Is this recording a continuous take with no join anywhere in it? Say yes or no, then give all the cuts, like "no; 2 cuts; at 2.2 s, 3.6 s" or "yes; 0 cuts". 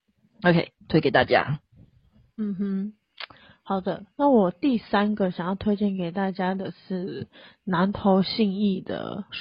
yes; 0 cuts